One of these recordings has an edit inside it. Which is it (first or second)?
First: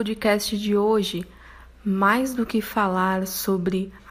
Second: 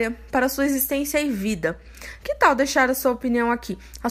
second